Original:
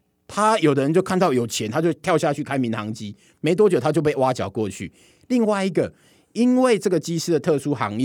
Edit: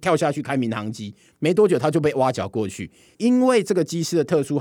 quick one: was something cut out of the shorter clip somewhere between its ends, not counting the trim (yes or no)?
yes